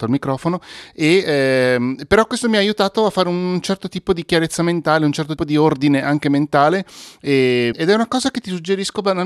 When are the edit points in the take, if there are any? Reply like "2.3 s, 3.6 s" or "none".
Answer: 5.4 s, 7.7 s